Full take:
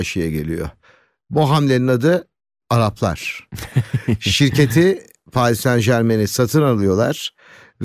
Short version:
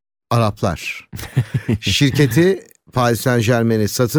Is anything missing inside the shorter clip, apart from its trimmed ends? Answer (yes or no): no